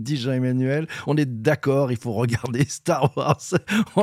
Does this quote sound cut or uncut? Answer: uncut